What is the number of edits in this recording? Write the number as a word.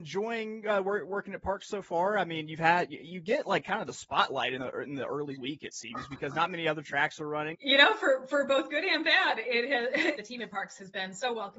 two